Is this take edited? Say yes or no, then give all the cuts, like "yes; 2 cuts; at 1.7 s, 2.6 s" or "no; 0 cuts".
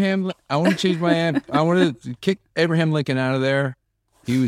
no; 0 cuts